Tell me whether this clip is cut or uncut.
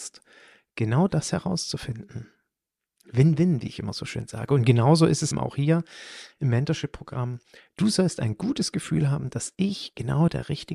cut